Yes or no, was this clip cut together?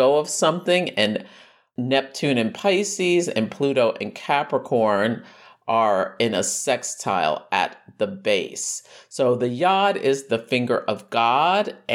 no